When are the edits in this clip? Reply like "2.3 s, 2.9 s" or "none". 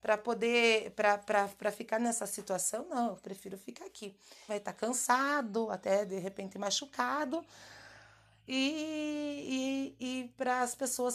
4.5 s